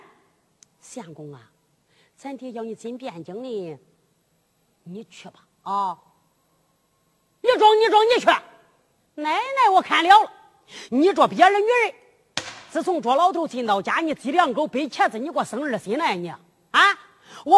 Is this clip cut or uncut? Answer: uncut